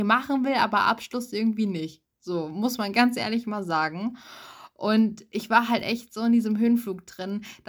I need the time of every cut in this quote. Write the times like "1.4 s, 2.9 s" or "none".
none

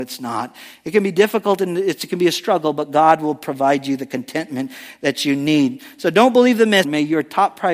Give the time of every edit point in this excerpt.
6.8 s

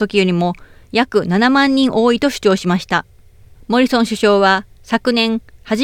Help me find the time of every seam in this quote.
3.5 s

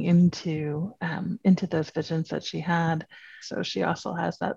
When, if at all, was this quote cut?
3.4 s

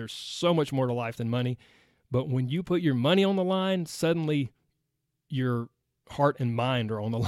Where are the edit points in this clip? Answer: none

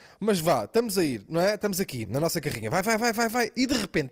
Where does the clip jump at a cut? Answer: 2.0 s

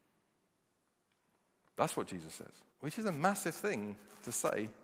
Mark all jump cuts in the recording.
2.7 s

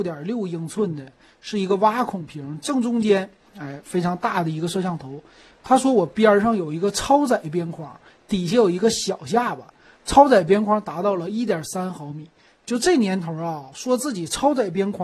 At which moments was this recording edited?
5.5 s

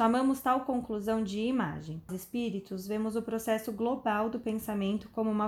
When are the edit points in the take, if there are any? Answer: 2.1 s

